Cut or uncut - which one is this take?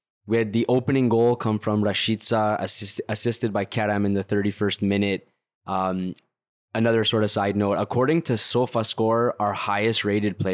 cut